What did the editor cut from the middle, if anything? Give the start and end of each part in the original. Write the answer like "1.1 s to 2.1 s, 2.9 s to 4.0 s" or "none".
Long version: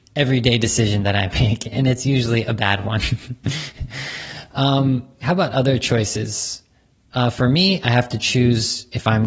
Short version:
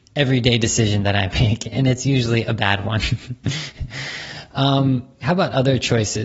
none